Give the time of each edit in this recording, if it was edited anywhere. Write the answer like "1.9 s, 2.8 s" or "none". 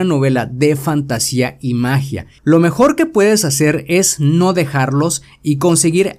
2.4 s